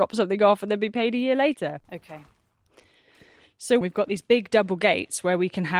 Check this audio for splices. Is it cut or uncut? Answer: cut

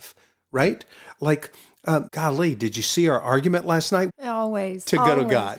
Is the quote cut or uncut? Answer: cut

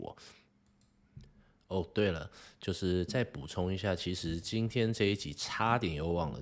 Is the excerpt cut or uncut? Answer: uncut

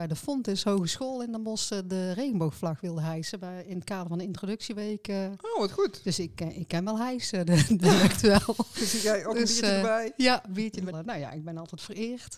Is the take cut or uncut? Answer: cut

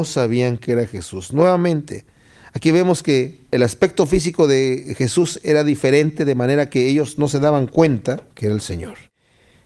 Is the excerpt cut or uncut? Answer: uncut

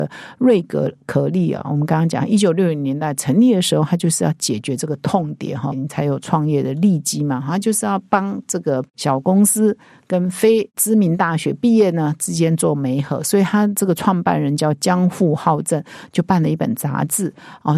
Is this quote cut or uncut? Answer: cut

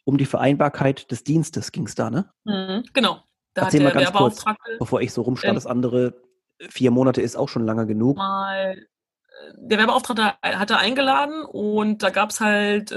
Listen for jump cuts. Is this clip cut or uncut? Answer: cut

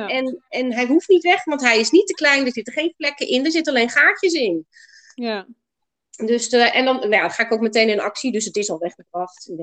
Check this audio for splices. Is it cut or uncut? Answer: uncut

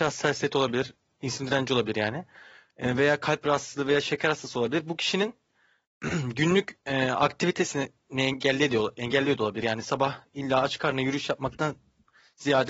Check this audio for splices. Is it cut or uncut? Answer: uncut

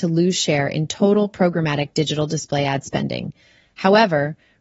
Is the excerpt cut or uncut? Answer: uncut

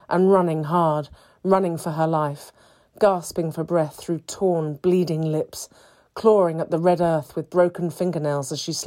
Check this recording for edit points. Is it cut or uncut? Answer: uncut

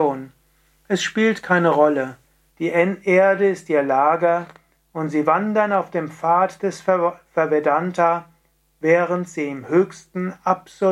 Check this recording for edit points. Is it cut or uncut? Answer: cut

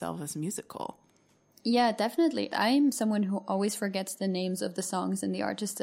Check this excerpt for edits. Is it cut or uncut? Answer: cut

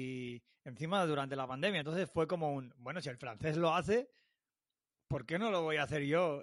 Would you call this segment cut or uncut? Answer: uncut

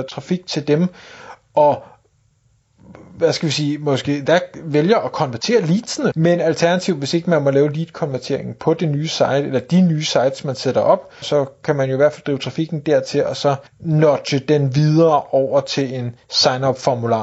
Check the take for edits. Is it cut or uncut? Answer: cut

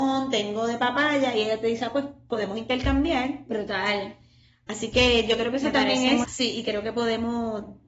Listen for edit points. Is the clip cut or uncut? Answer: cut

